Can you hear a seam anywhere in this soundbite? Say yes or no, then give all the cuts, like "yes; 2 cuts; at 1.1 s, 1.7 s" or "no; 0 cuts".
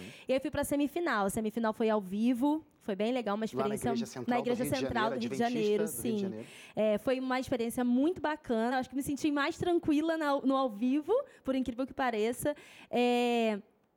no; 0 cuts